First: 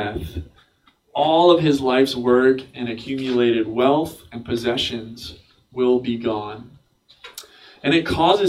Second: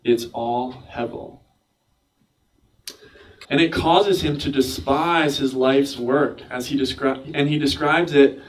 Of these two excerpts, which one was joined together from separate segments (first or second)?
second